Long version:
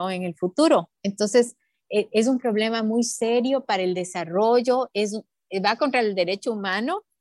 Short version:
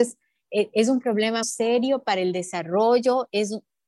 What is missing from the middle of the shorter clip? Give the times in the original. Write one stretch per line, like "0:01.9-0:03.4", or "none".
0:02.8-0:03.0